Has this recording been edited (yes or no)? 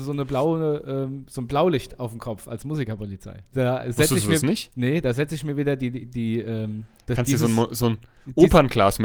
yes